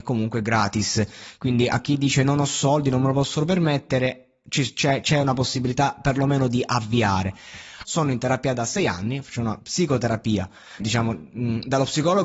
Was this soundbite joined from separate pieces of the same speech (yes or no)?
yes